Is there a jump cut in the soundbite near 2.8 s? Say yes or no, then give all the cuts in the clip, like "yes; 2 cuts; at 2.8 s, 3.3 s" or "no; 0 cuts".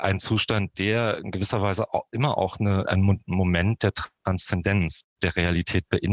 yes; 2 cuts; at 2.8 s, 5.0 s